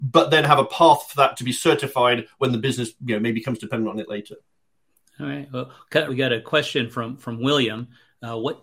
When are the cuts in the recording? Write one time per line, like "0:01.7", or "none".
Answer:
0:06.1